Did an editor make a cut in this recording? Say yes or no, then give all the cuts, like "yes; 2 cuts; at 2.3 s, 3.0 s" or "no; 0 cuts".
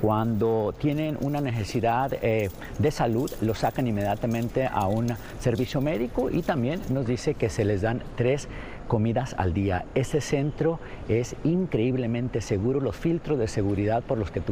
no; 0 cuts